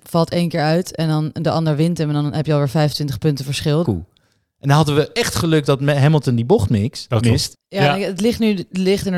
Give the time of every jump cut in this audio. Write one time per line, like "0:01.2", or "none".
0:03.8
0:07.5